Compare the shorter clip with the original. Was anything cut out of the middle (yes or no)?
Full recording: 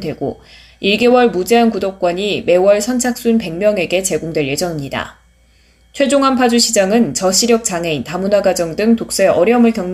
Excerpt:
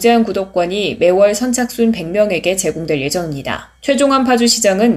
yes